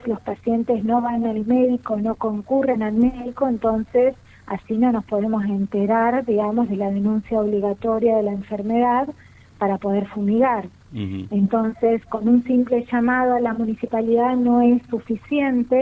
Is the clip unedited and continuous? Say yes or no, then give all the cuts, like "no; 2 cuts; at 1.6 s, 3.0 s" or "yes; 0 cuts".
yes; 0 cuts